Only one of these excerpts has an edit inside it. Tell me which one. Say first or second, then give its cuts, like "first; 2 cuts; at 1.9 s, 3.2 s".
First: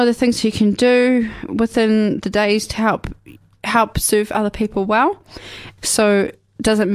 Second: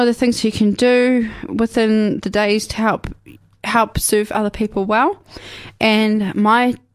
first; 1 cut; at 5.8 s